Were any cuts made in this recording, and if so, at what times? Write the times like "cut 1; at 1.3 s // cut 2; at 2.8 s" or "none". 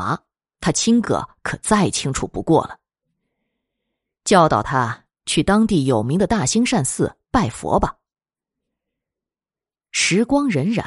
cut 1; at 1.0 s